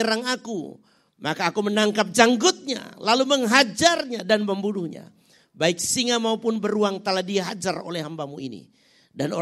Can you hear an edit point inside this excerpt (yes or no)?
no